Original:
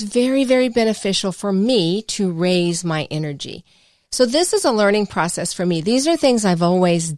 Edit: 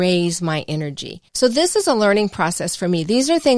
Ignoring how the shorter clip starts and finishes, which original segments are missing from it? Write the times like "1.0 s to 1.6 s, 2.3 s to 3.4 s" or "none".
3.7 s to 4.1 s